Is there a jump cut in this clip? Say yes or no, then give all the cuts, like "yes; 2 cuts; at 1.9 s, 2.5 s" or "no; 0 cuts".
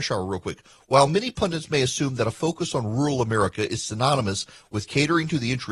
no; 0 cuts